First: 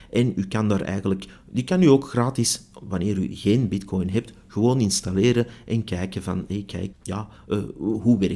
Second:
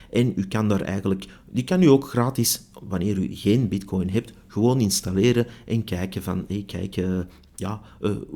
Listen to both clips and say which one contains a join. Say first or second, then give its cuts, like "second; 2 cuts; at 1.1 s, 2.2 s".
first; 1 cut; at 6.9 s